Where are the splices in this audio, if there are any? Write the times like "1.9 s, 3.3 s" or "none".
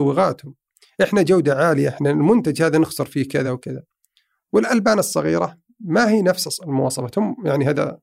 3.4 s